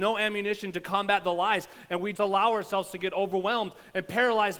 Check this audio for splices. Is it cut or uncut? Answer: cut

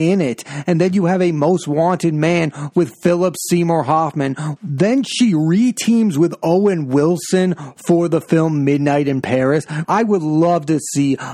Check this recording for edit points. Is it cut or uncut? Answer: cut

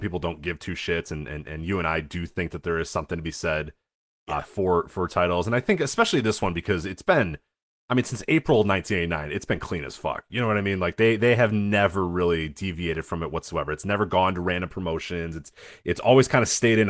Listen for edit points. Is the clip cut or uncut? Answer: uncut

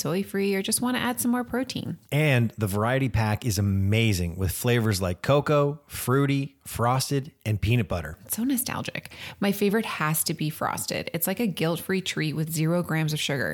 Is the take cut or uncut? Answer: uncut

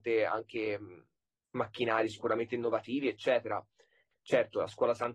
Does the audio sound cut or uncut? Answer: cut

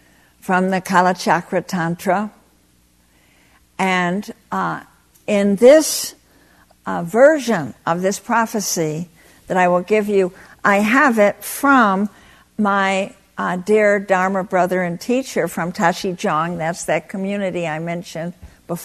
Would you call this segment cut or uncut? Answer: uncut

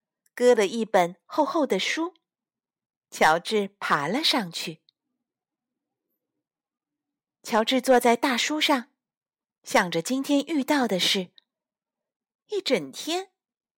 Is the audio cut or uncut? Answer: uncut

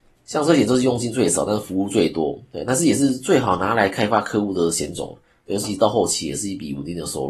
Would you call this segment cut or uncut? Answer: cut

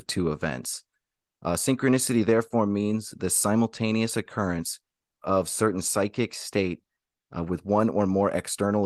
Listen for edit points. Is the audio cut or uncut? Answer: uncut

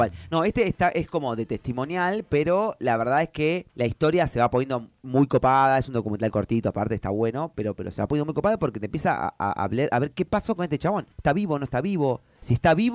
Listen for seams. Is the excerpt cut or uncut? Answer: uncut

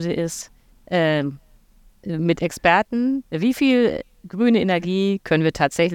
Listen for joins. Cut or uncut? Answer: cut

